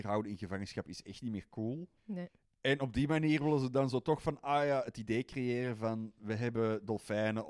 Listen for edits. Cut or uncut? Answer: cut